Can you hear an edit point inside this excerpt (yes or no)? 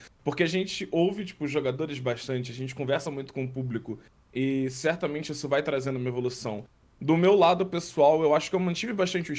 no